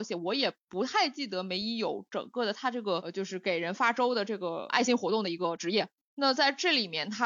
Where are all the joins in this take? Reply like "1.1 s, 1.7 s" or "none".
none